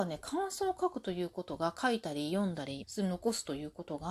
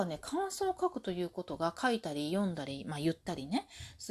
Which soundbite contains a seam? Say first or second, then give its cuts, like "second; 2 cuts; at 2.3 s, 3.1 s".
first; 1 cut; at 2.8 s